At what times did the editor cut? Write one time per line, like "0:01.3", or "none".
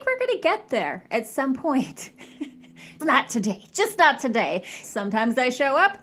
0:03.0
0:04.8